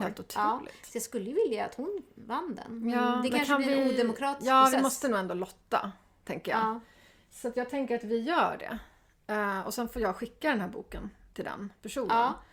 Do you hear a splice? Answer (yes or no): no